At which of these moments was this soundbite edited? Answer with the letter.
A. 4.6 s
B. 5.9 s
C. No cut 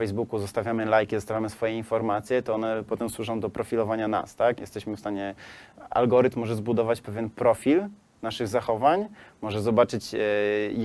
A